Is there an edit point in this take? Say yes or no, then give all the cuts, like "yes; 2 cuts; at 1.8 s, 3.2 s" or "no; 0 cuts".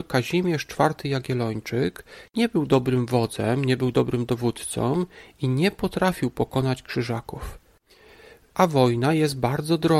no; 0 cuts